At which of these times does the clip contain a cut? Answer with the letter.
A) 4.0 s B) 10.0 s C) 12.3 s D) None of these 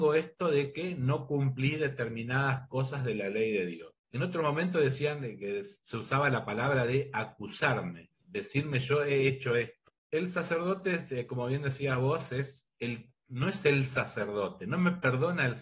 A